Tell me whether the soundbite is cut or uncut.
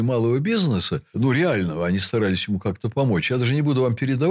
uncut